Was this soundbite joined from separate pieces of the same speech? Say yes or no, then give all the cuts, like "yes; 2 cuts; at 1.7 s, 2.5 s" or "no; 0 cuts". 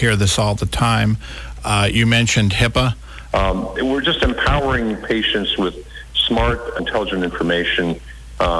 yes; 2 cuts; at 3.3 s, 6.8 s